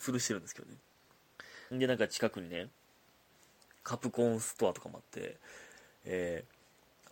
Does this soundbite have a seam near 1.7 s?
yes; 1 cut; at 1.7 s

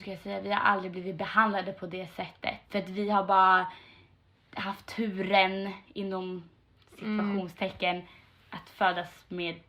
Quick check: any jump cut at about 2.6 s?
yes; 1 cut; at 2.6 s

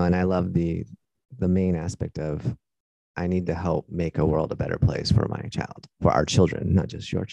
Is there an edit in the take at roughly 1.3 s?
no; 1 cut; at 5.9 s

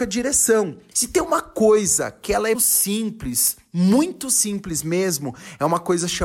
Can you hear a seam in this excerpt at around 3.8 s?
no; 2 cuts; at 0.9 s, 2.5 s

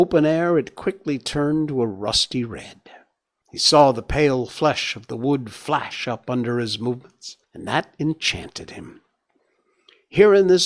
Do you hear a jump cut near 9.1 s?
no; 2 cuts; at 3.4 s, 7.4 s

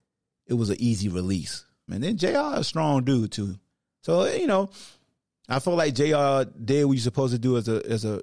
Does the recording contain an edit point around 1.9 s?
yes; 1 cut; at 1.9 s

